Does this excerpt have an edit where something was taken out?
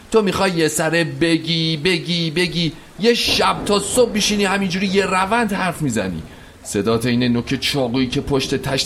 no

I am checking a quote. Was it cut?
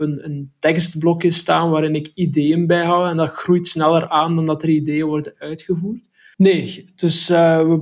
yes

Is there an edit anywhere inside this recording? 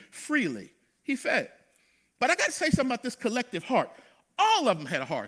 no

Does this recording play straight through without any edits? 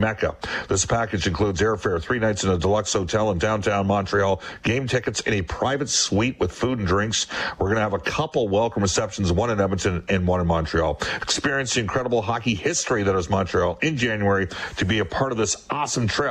yes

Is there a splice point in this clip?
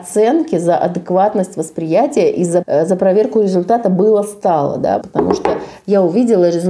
yes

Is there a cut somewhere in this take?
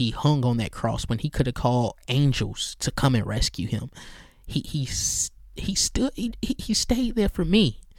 no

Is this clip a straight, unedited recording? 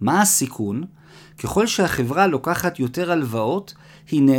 yes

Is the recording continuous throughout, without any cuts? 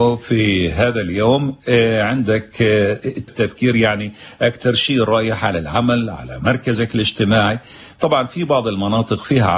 no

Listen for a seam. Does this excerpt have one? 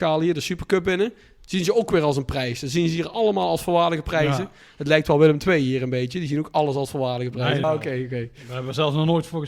yes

